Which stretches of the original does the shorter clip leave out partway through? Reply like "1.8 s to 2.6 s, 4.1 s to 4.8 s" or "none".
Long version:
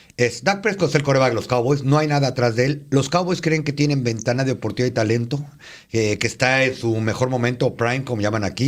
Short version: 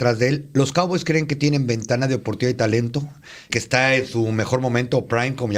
5.9 s to 6.2 s